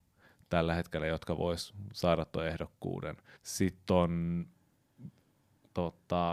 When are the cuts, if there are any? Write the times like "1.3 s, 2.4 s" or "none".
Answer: 3.4 s